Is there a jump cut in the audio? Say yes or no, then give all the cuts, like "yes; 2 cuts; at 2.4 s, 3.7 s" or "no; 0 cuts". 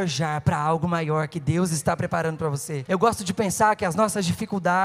yes; 1 cut; at 2.9 s